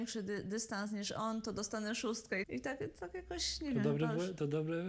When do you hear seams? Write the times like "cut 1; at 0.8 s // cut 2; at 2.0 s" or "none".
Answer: cut 1; at 2.4 s